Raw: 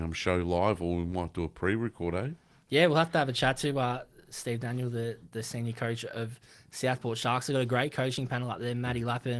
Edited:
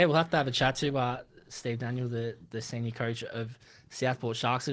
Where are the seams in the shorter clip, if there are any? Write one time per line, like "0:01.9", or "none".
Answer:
none

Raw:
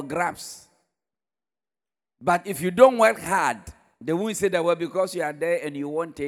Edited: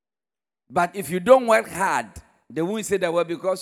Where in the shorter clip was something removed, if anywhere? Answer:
none

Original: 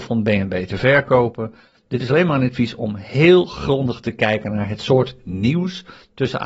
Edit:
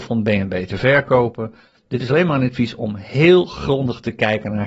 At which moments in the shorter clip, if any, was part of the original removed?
none

